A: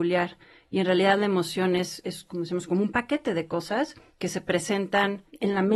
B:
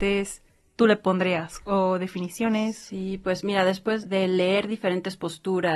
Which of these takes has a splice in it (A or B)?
B